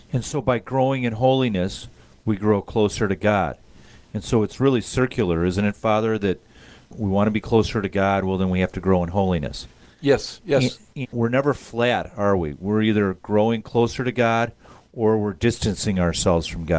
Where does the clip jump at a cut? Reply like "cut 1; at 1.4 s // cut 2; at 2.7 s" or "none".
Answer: cut 1; at 11.0 s